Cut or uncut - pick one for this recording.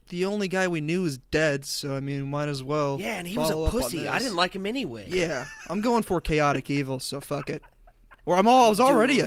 uncut